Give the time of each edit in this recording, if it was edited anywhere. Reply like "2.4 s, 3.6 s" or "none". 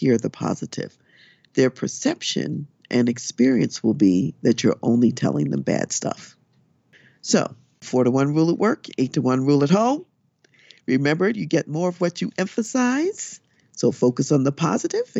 none